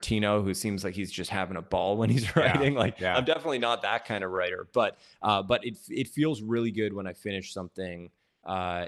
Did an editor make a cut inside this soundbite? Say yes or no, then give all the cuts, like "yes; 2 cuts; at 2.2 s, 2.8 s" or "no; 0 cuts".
no; 0 cuts